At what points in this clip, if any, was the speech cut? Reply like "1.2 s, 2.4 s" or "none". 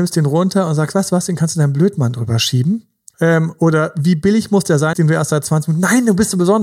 3.1 s, 4.9 s